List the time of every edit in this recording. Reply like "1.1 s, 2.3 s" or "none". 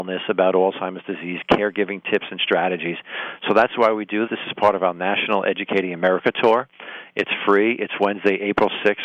4.3 s